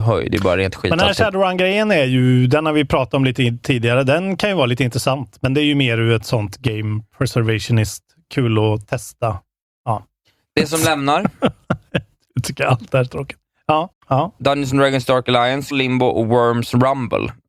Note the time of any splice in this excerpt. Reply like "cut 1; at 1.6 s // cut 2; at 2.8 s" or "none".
cut 1; at 13.9 s // cut 2; at 15.7 s